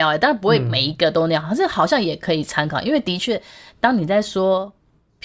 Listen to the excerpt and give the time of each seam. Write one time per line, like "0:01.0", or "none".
none